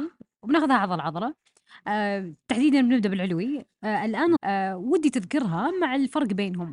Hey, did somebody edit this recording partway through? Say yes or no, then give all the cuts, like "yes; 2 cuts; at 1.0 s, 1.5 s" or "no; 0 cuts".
yes; 1 cut; at 4.4 s